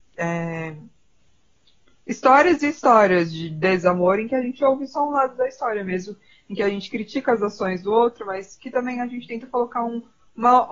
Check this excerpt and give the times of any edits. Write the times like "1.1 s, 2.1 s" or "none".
none